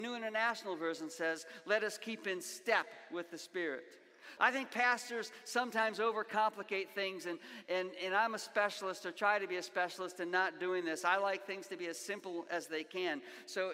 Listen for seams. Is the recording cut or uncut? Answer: cut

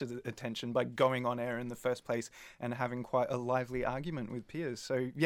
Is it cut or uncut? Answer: uncut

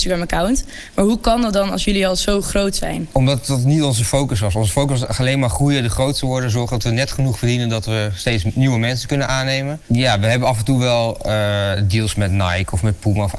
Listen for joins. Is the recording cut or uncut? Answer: uncut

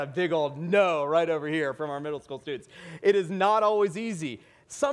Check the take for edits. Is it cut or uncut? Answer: uncut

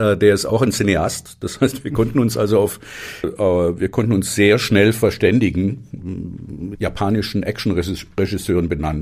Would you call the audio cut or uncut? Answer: cut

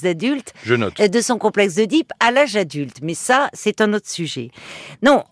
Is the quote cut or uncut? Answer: uncut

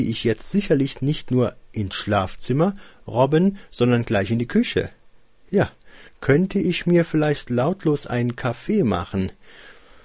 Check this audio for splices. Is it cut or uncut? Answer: cut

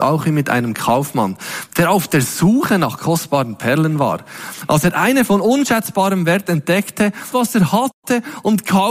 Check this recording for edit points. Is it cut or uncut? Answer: cut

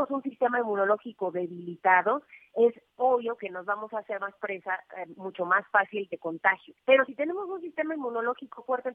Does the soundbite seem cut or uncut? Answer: cut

